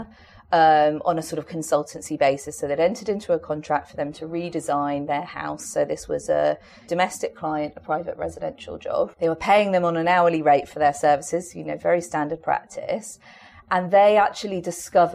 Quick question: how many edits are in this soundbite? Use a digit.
0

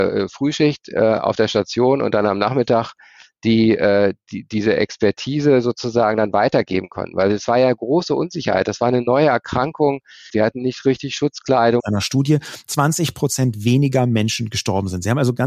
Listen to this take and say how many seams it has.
2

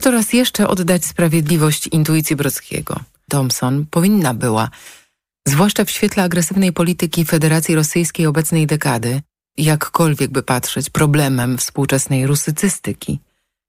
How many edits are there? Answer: 2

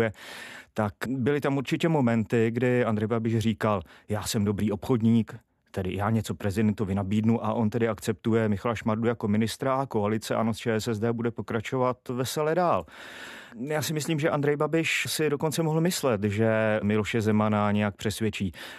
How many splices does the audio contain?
1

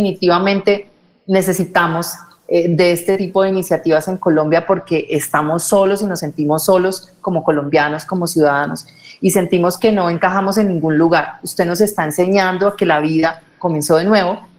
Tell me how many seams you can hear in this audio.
0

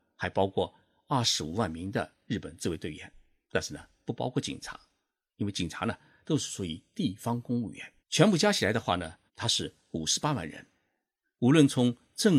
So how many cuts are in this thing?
3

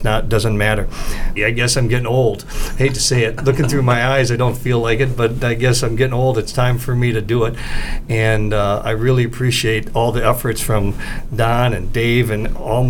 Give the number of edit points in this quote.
1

